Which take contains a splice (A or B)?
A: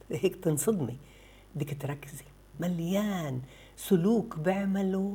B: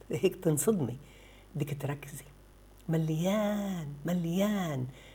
A